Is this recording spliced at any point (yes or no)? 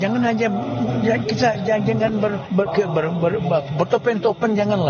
yes